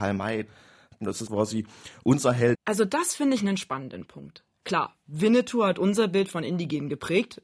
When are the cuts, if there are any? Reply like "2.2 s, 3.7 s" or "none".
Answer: 1.3 s, 2.5 s